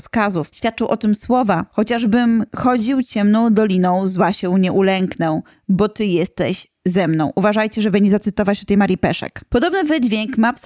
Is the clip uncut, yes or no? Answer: yes